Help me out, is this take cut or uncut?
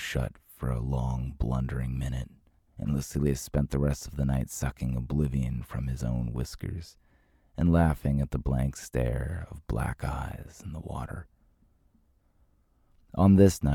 cut